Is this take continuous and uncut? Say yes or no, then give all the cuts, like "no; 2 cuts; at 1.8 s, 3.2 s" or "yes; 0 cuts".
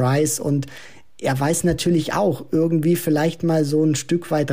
yes; 0 cuts